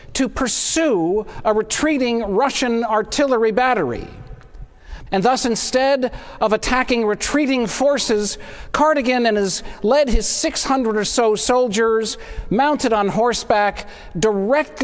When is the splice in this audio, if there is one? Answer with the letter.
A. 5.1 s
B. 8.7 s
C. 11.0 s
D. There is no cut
A